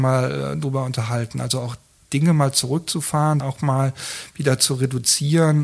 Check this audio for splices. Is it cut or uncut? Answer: cut